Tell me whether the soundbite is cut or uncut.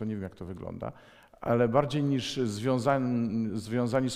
uncut